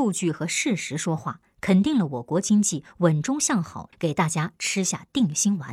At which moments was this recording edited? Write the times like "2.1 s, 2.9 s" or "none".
3.9 s

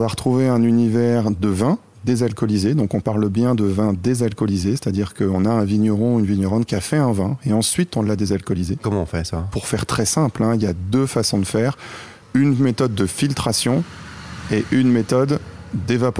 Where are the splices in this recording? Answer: 12.2 s

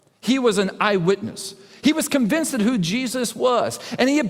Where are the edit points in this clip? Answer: none

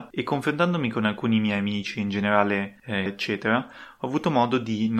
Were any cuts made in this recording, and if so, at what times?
3.1 s

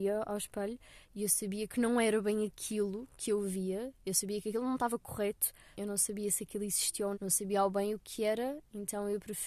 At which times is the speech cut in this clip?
5.8 s, 7.1 s

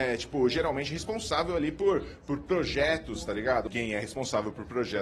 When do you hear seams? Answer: 3.7 s

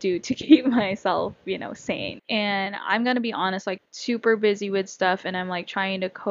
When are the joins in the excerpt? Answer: 2.2 s, 3.8 s

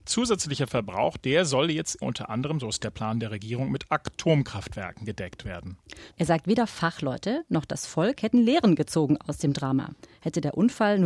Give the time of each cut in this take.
2.0 s, 6.1 s

